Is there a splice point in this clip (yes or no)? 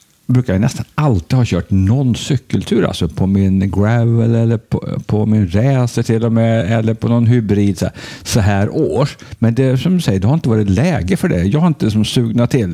no